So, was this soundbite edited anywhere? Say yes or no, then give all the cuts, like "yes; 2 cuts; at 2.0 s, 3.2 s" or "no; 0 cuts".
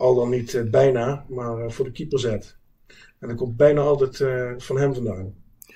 no; 0 cuts